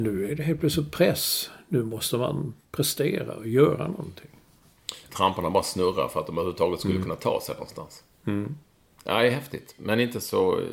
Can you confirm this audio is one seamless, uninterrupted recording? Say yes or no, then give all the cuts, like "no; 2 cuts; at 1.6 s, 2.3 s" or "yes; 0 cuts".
no; 1 cut; at 5.1 s